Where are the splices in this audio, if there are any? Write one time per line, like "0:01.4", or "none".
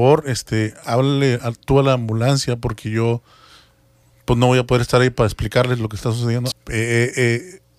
0:06.5